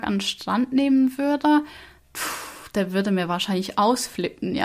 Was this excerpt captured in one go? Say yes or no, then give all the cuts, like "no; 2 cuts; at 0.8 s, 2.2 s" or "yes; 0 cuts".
yes; 0 cuts